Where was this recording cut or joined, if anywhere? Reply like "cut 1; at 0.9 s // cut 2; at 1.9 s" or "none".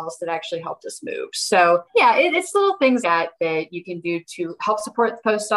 cut 1; at 1.9 s // cut 2; at 3.0 s